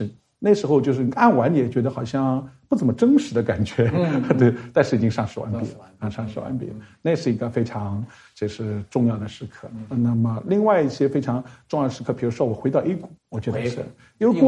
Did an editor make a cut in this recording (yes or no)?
yes